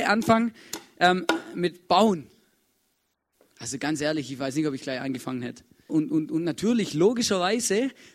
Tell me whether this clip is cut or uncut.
cut